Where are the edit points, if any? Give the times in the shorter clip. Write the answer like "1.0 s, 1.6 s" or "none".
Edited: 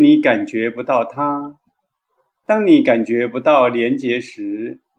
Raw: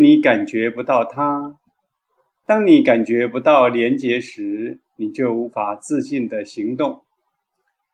none